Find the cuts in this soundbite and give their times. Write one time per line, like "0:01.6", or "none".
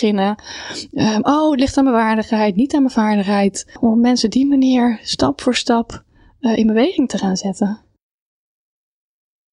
none